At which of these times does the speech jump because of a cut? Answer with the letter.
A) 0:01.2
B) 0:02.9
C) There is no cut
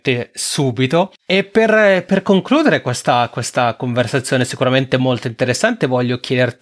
C